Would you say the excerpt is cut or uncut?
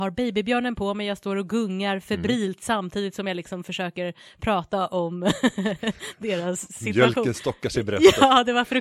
uncut